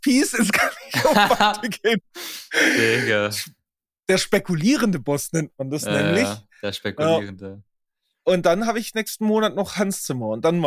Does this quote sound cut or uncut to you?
uncut